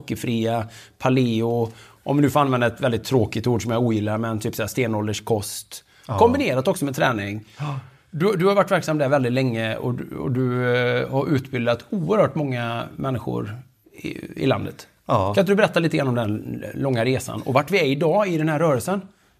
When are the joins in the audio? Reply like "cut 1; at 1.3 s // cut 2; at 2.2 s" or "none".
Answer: none